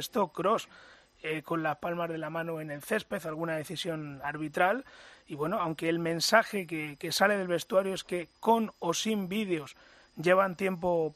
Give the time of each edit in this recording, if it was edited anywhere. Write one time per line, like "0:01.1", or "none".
none